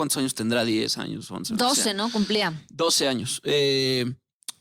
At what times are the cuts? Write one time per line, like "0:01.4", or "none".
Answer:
none